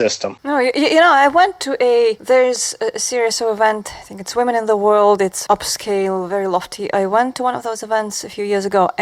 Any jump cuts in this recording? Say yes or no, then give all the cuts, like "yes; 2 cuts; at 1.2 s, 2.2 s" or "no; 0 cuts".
yes; 1 cut; at 5.5 s